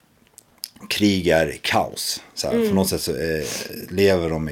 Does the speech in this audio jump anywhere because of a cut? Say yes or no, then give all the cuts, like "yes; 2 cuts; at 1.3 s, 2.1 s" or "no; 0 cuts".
no; 0 cuts